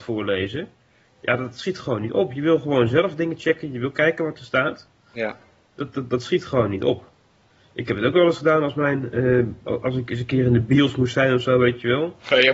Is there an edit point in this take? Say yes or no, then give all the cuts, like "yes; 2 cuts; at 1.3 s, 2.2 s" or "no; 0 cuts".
no; 0 cuts